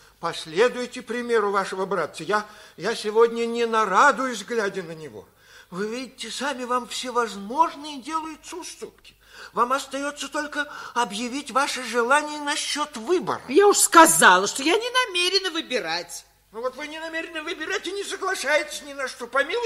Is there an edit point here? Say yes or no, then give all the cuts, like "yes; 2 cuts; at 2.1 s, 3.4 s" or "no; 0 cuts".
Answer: no; 0 cuts